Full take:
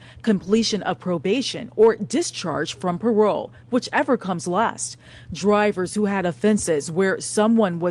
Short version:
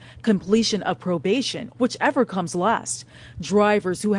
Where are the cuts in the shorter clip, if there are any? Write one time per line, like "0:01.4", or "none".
0:01.7